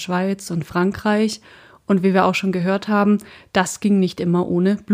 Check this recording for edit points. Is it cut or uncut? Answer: uncut